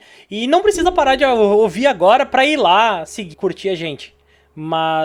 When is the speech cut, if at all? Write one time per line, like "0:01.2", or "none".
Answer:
0:03.3